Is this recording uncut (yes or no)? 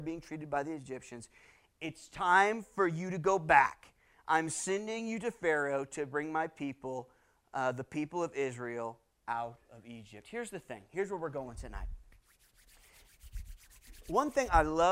yes